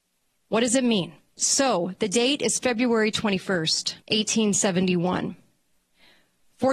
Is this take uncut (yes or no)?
no